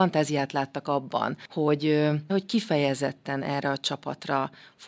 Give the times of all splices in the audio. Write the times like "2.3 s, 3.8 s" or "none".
2.3 s